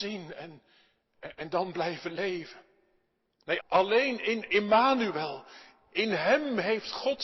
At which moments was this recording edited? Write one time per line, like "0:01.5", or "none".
0:03.6

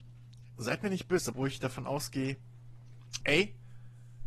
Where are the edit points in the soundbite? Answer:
0:01.3
0:03.2

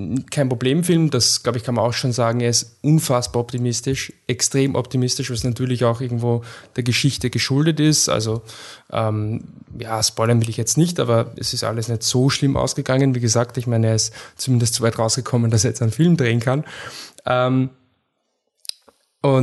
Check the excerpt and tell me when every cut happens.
none

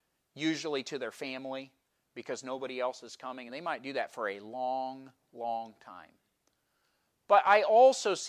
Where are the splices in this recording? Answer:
none

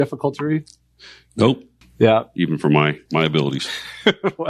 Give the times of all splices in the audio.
0:01.8
0:03.1

